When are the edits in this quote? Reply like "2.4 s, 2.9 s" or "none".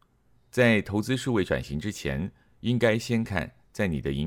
3.2 s